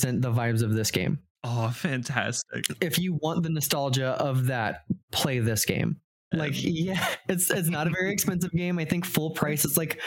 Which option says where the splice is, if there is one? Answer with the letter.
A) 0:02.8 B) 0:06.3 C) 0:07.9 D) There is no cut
B